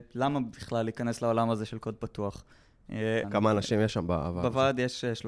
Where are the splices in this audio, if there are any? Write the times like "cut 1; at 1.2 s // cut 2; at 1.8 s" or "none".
cut 1; at 3.2 s